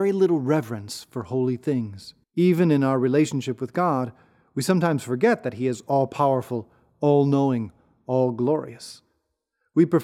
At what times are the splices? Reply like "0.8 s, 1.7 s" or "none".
2.2 s